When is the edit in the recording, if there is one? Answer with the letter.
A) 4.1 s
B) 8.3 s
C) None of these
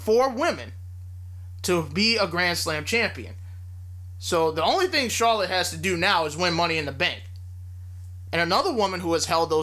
B